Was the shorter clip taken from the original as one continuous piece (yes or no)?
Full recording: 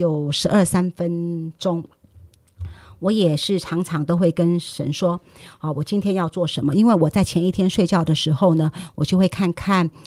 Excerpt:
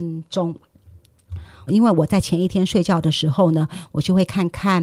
no